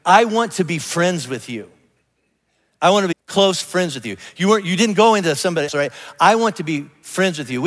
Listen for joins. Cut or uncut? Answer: cut